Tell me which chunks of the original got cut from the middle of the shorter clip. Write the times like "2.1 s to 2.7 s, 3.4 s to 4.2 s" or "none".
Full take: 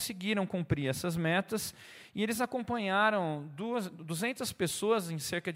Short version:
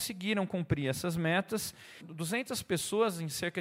2.0 s to 3.9 s